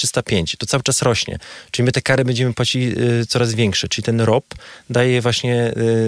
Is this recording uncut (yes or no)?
yes